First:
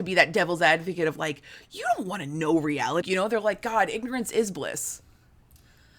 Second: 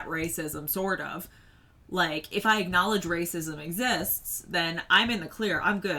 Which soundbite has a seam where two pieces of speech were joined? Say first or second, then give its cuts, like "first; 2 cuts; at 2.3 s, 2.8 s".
first; 1 cut; at 3.0 s